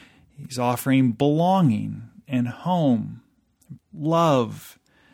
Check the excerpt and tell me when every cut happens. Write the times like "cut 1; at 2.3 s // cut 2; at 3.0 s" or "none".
cut 1; at 3.8 s